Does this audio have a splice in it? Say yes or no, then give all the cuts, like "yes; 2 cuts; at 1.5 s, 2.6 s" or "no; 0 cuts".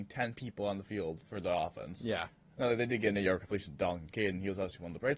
no; 0 cuts